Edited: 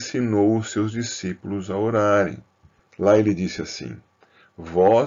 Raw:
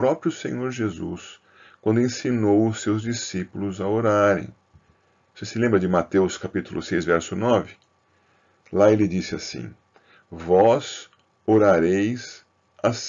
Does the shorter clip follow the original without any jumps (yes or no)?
no